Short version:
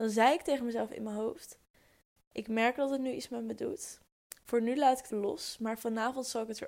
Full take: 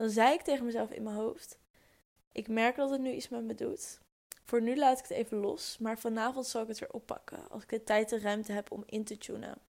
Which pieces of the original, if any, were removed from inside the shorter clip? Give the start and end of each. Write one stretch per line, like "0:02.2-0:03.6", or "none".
0:05.1-0:05.3

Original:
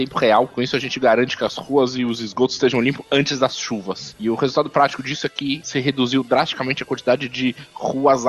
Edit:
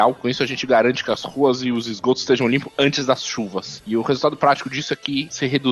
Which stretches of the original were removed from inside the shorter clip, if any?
none

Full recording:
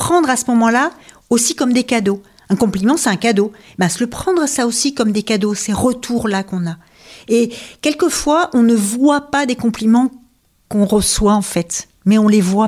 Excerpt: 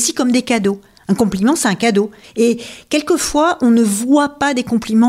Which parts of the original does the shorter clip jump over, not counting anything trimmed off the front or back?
0:03.6-0:07.2

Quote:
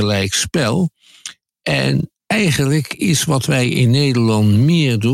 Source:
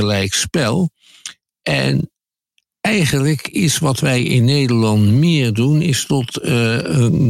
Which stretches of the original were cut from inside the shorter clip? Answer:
0:02.2-0:02.7

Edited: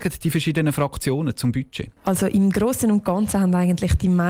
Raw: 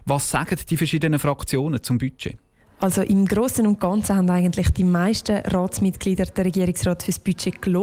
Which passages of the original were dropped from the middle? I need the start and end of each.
0:02.4-0:02.7

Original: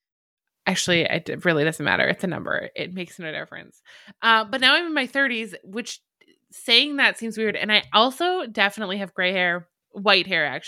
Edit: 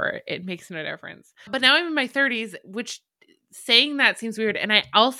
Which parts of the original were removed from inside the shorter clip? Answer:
0:04.0-0:04.5

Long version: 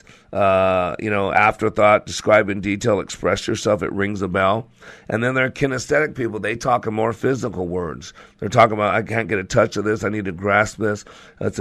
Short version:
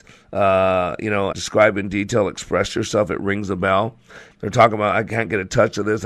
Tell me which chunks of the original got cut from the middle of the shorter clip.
0:01.3-0:02.0
0:05.0-0:08.3

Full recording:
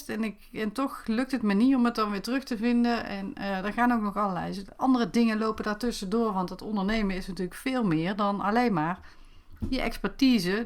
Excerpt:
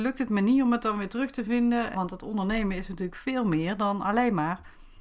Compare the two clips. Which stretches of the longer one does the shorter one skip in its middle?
0:03.1-0:06.3

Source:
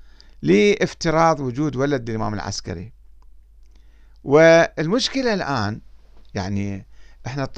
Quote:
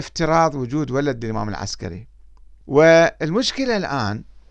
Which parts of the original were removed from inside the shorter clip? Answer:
0:03.5-0:04.2

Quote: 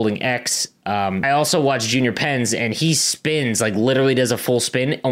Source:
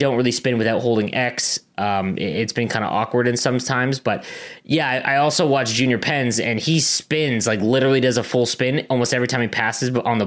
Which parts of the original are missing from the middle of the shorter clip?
0:02.2-0:05.1

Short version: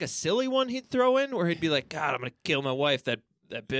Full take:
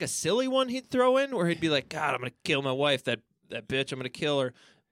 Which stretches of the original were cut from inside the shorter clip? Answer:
none

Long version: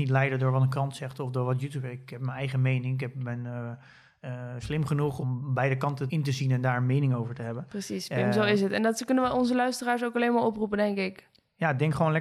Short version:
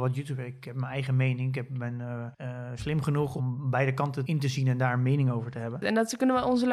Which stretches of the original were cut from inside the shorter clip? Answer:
0:03.8-0:04.2
0:07.7-0:08.7

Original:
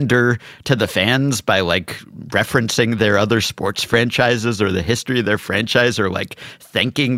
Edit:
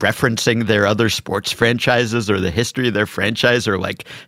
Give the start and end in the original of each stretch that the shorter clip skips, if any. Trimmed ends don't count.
none

